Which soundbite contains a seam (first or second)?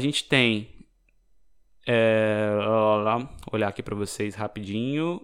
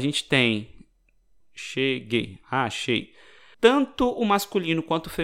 second